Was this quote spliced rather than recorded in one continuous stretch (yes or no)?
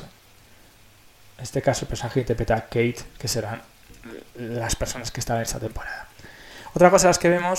no